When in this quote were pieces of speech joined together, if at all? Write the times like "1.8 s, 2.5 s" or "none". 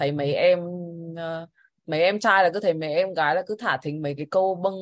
none